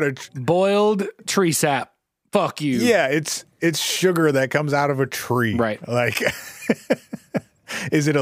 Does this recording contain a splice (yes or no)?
no